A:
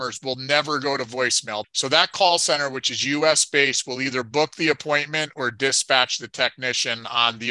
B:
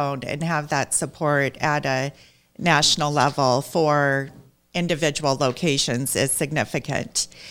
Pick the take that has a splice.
A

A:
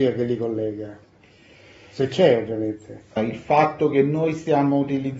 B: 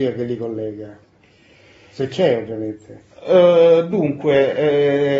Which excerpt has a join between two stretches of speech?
A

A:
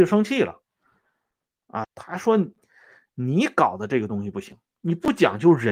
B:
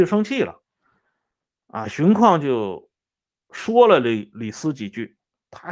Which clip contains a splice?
A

